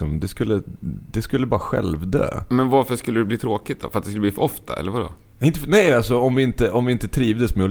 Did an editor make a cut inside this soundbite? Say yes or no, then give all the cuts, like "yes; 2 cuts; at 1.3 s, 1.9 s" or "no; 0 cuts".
no; 0 cuts